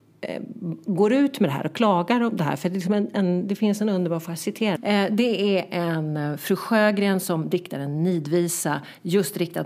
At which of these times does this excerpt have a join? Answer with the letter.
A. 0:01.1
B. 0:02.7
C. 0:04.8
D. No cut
C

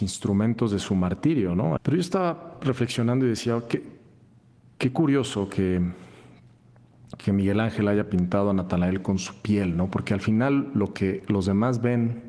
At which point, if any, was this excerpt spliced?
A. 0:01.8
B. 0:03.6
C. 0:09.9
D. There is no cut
A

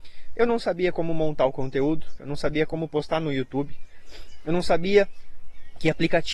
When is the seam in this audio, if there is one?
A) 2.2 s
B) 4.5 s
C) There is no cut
A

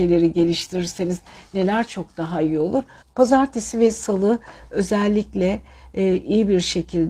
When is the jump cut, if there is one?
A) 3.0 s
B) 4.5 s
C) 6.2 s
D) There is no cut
A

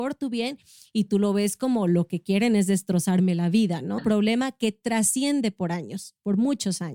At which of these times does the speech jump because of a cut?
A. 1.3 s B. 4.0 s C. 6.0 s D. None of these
B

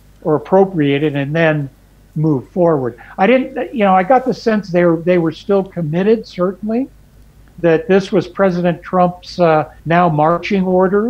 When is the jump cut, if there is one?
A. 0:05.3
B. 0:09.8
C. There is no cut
B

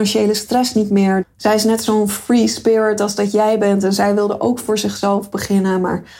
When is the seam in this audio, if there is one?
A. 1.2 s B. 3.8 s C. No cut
A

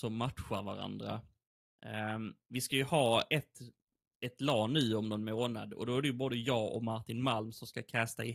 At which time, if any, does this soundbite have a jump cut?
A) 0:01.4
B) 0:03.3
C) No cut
B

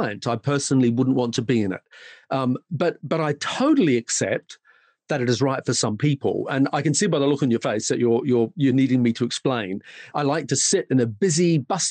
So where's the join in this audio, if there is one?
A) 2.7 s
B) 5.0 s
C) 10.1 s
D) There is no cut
C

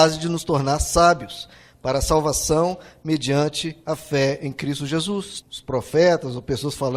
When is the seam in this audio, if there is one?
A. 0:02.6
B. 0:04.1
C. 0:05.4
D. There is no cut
C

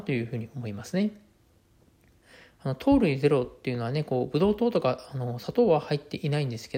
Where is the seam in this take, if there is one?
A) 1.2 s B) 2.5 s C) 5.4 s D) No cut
D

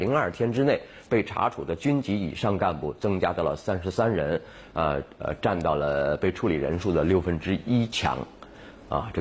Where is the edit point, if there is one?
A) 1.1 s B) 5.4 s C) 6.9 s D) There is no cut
D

